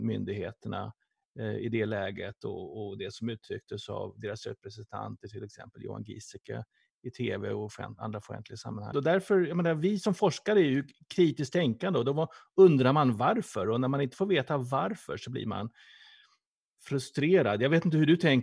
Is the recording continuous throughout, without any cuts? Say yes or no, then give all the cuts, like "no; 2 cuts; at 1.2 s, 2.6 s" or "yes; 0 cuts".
no; 1 cut; at 8.9 s